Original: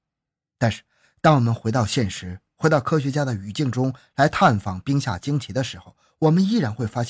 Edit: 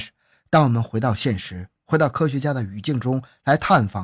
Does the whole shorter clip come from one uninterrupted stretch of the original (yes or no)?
yes